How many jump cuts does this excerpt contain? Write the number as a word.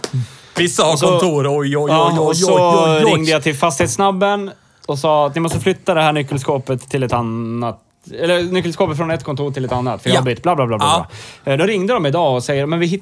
zero